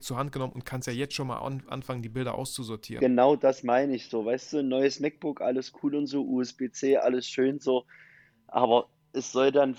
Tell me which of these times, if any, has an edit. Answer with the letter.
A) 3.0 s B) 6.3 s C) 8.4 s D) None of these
D